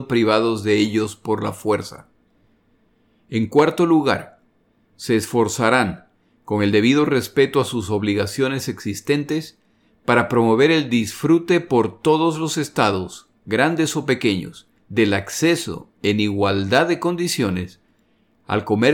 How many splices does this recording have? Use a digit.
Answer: 1